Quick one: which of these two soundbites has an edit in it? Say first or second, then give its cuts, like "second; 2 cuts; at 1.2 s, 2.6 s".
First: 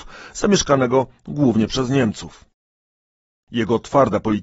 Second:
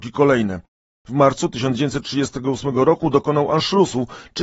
second; 1 cut; at 0.9 s